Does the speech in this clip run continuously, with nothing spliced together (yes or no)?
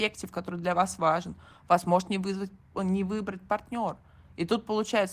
yes